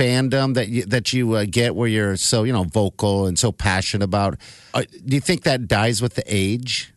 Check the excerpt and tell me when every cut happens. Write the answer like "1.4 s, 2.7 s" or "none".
4.7 s